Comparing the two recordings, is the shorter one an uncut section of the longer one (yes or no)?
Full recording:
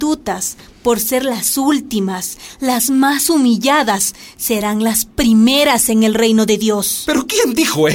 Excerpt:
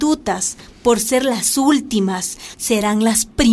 no